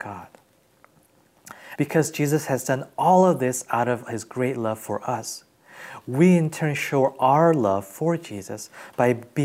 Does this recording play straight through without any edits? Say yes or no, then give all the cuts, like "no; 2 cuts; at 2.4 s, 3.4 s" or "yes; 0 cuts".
no; 1 cut; at 1.8 s